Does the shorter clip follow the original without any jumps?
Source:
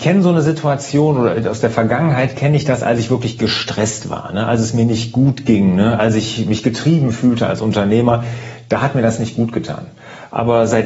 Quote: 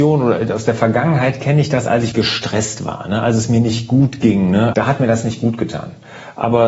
no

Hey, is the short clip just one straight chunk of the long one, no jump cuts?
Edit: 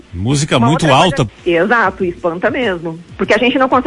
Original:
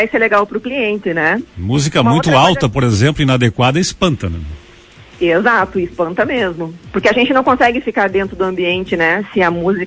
no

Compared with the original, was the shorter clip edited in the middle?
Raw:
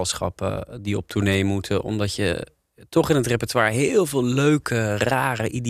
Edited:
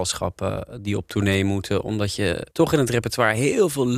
yes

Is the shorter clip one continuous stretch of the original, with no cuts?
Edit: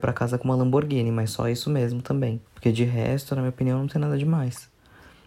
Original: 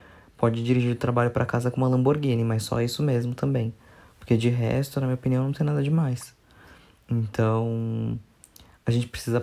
no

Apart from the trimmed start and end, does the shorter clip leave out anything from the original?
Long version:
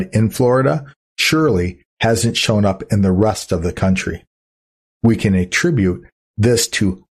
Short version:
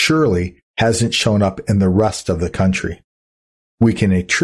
no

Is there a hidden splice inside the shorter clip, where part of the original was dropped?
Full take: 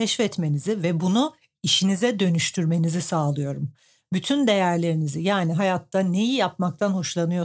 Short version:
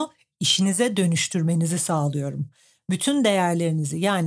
no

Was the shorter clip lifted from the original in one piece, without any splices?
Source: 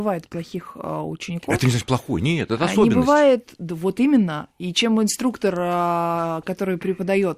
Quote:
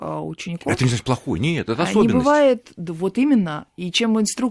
yes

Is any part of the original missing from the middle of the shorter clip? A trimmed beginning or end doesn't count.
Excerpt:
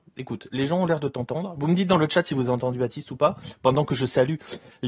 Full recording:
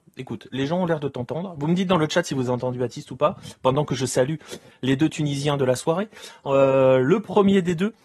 no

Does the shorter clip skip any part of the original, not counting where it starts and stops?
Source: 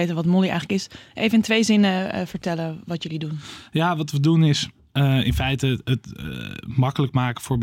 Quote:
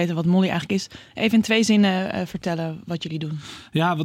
no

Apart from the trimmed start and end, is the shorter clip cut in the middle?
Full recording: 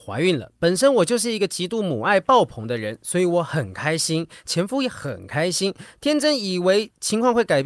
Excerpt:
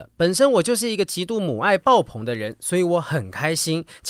no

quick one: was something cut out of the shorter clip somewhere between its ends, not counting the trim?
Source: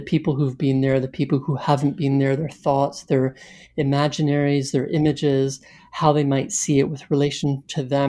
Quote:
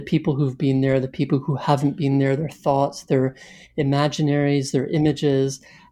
no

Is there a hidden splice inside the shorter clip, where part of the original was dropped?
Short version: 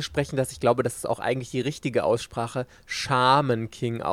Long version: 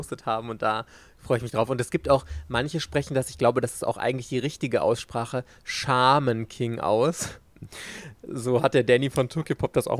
no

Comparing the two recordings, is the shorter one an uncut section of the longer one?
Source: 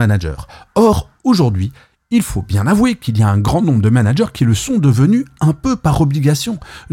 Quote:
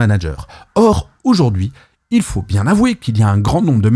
yes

